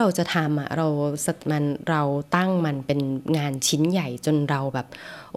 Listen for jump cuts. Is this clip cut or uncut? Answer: cut